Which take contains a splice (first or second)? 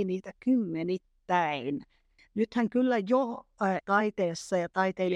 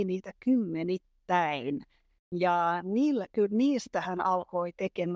first